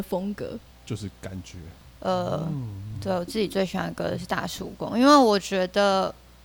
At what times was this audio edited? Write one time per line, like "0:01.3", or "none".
0:01.8